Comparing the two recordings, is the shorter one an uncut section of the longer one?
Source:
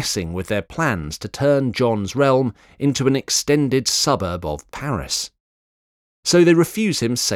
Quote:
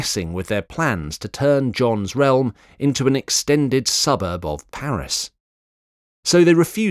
yes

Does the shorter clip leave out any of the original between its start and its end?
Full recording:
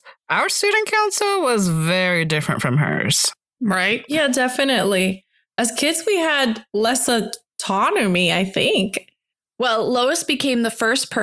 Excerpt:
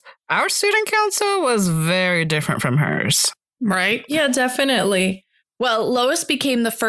yes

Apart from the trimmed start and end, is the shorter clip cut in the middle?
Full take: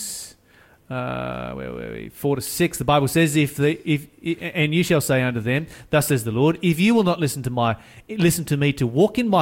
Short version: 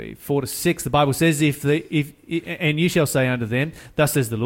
no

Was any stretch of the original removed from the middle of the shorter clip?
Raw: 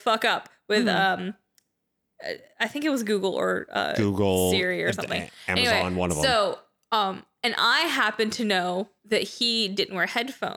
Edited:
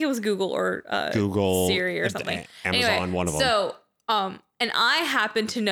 no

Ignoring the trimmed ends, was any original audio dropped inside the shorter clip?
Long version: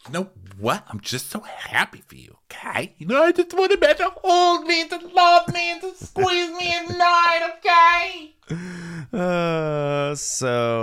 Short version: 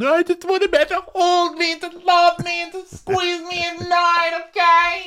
no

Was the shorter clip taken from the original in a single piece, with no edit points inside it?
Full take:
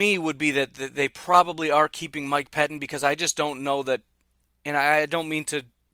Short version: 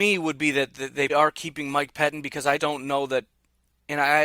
no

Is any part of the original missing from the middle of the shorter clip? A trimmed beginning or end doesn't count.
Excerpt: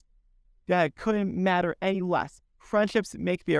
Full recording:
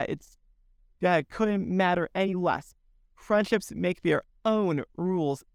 yes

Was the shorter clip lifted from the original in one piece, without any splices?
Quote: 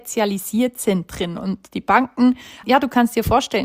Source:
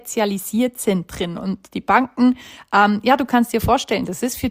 no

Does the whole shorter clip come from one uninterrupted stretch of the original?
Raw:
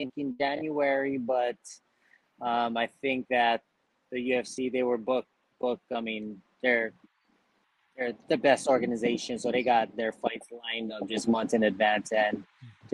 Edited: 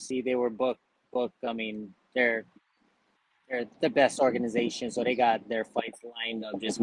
yes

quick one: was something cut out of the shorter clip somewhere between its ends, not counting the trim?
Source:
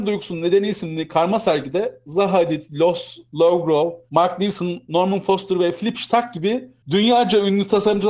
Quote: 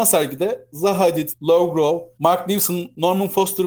yes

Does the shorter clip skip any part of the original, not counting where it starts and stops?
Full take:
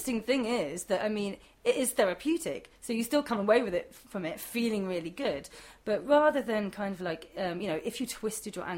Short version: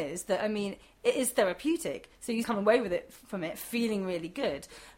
yes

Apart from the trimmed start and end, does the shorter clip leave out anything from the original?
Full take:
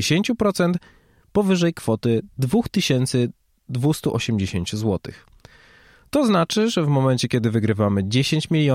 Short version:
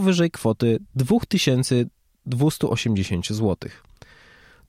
no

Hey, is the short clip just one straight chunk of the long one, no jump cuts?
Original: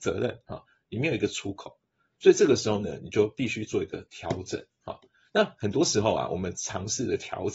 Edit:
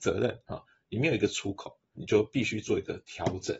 no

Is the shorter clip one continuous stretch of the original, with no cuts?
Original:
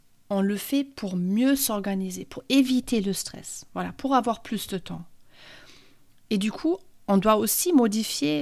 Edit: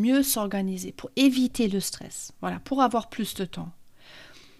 yes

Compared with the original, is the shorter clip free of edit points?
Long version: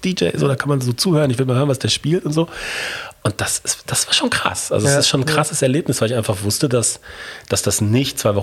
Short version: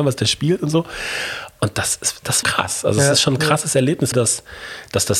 no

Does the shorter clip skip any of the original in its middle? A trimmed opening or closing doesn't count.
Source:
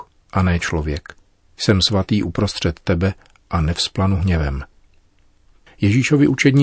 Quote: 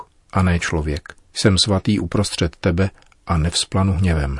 yes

